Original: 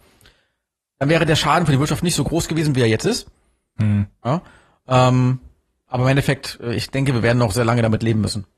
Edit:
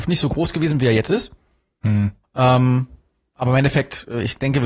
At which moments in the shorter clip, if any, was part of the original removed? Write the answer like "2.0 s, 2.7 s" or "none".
2.2 s